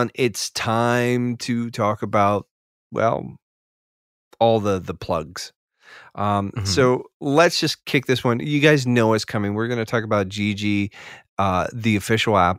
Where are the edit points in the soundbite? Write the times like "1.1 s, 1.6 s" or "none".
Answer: none